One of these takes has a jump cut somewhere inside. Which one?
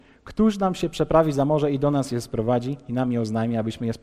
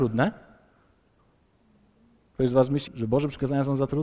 second; 1 cut; at 2.9 s

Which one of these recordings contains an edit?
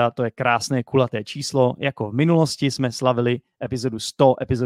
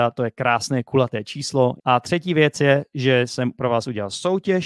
second; 1 cut; at 1.8 s

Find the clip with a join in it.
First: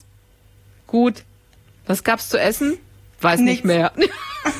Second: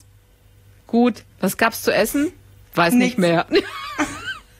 second; 1 cut; at 1.3 s

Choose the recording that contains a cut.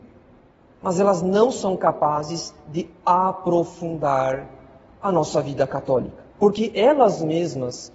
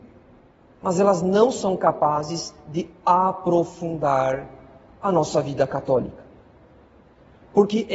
first; 1 cut; at 6.3 s

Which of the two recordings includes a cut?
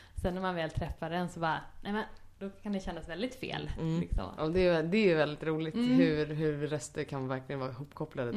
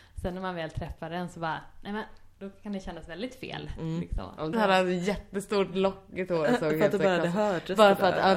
second; 1 cut; at 4.5 s

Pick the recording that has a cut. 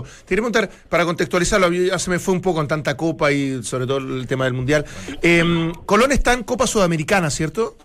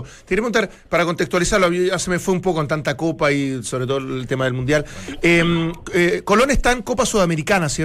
first; 1 cut; at 5.9 s

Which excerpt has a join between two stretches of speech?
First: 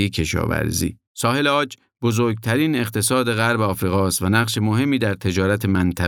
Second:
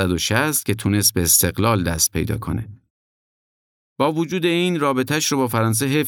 first; 1 cut; at 1.1 s

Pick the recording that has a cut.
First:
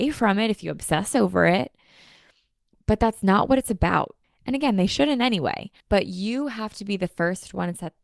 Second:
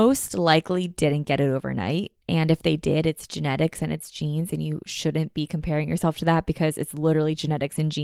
first; 2 cuts; at 4.2 s, 5.8 s

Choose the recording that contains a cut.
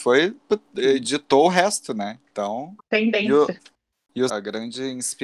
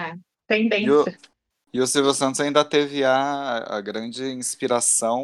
first; 2 cuts; at 2.8 s, 4.3 s

